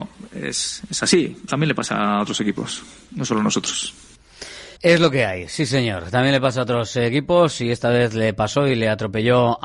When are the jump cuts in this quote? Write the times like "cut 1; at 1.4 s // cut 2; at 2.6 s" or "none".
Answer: cut 1; at 1.5 s // cut 2; at 4.8 s